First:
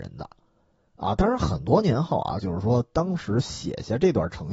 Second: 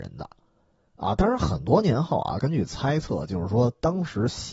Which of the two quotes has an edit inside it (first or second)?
first